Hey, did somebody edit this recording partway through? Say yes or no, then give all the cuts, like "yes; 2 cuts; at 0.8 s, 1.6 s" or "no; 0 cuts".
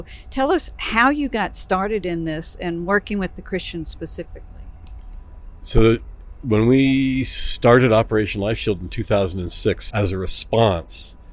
yes; 1 cut; at 9.9 s